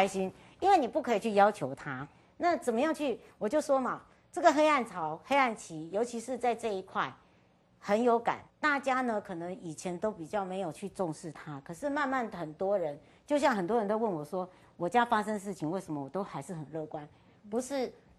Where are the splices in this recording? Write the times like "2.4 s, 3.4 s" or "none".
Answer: 8.5 s